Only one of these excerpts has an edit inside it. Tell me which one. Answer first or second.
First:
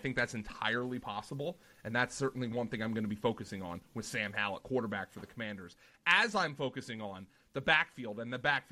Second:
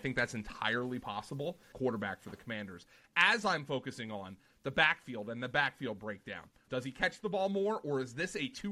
second